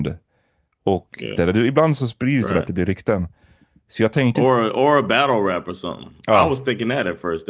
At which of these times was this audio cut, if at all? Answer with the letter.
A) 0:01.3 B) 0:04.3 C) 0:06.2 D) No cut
A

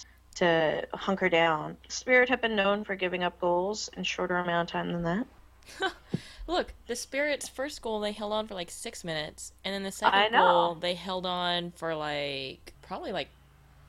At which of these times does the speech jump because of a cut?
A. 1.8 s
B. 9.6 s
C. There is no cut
A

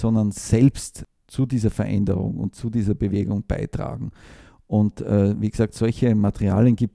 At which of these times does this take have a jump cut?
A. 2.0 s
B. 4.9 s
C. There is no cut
C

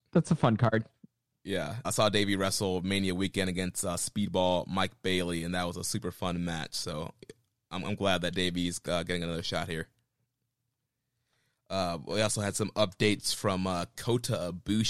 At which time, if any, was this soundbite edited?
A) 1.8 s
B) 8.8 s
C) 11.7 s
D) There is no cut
A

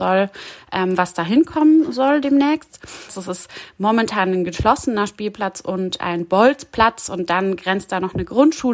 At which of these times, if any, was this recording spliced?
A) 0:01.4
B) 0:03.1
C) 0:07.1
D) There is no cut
B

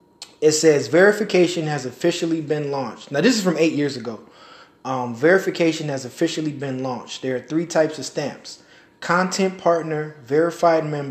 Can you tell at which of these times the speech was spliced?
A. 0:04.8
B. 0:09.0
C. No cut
C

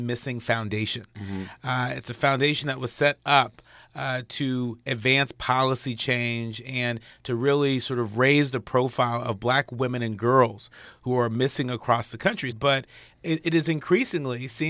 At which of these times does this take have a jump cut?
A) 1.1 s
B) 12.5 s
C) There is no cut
B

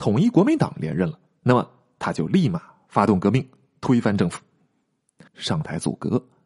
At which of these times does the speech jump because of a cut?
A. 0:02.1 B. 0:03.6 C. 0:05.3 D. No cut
C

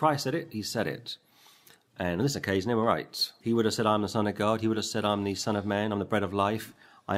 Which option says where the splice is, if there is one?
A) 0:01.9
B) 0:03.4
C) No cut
B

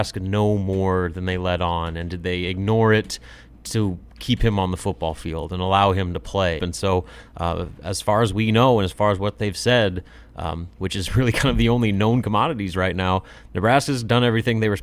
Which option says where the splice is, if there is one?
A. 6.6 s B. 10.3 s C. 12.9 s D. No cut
A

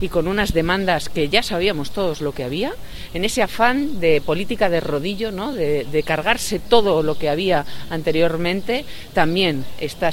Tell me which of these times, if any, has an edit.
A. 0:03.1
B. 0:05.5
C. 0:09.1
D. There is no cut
D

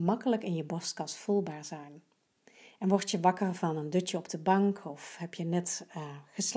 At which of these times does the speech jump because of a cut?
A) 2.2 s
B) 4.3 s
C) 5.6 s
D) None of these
D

